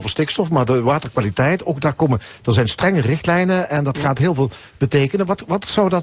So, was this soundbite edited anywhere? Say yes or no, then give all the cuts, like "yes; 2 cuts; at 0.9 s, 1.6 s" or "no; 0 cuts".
no; 0 cuts